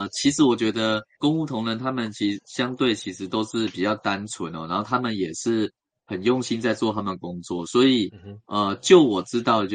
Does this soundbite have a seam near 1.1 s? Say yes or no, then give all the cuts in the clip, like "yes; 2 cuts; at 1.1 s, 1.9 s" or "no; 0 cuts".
yes; 1 cut; at 1.1 s